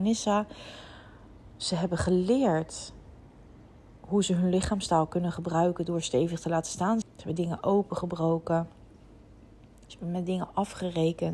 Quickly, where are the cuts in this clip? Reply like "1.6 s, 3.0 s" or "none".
7.0 s